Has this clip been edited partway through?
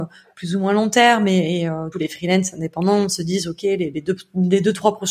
yes; 1 cut; at 1.9 s

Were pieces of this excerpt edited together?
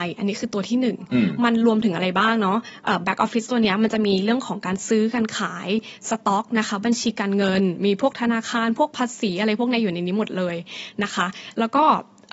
no; 0 cuts

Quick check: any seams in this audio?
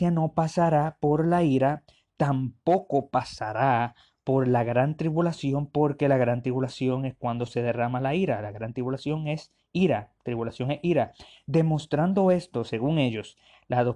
no; 0 cuts

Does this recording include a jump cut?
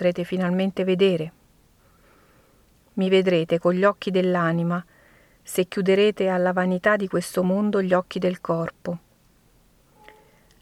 no; 0 cuts

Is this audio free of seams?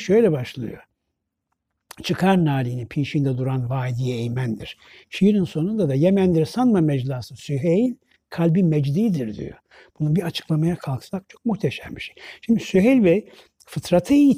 yes; 0 cuts

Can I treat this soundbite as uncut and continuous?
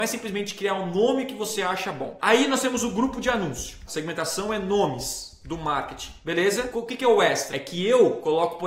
no; 2 cuts; at 2.2 s, 3.9 s

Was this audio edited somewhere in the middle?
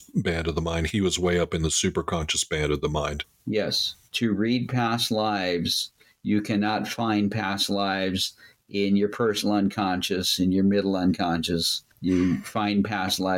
no; 0 cuts

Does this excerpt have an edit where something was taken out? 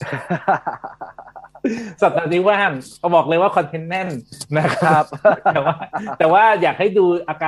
no; 0 cuts

